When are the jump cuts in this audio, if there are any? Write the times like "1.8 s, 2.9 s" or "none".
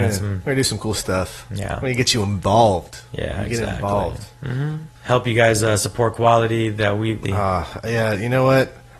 5.0 s, 7.2 s